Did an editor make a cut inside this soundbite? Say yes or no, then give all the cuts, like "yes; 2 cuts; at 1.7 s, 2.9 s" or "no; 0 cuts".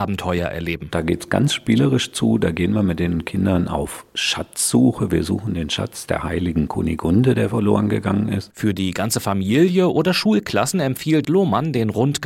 yes; 2 cuts; at 8.5 s, 11.2 s